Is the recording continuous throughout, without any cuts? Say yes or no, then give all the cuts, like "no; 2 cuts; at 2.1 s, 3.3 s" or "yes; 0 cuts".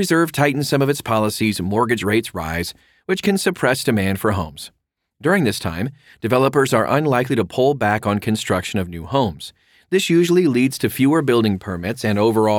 yes; 0 cuts